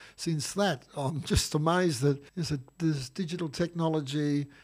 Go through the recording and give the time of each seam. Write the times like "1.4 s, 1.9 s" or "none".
2.3 s